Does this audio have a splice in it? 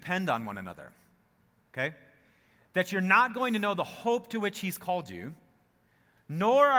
no; 0 cuts

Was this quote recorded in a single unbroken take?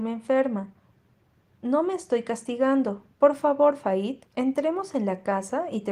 no; 2 cuts; at 3.1 s, 4.3 s

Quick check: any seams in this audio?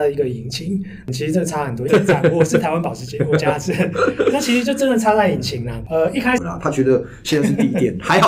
yes; 2 cuts; at 1.9 s, 6.4 s

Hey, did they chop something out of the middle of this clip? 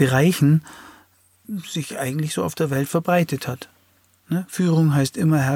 no; 0 cuts

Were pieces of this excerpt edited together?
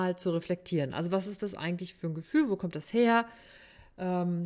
no; 0 cuts

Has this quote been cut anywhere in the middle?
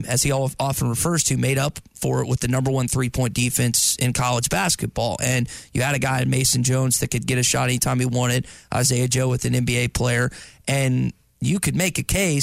no; 0 cuts

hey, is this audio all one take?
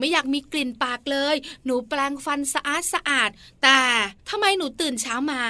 no; 1 cut; at 4.2 s

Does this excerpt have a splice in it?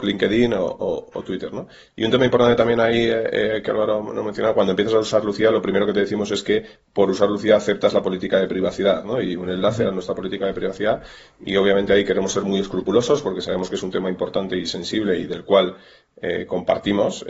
no; 0 cuts

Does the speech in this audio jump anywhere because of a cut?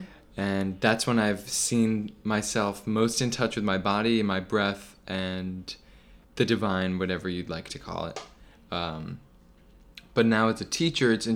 yes; 1 cut; at 6.2 s

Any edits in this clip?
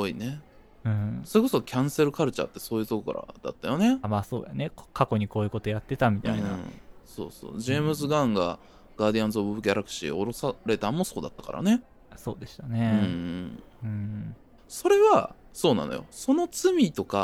yes; 1 cut; at 4.0 s

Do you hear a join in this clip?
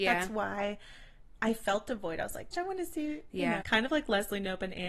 yes; 2 cuts; at 2.5 s, 3.6 s

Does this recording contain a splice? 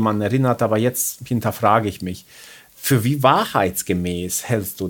no; 0 cuts

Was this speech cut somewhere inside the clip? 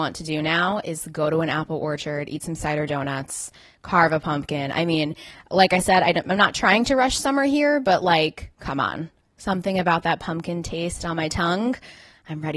no; 0 cuts

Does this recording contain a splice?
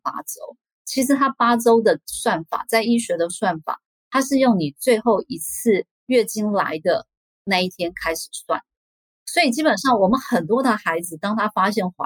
no; 0 cuts

